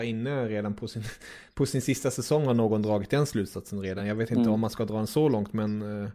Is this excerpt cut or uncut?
uncut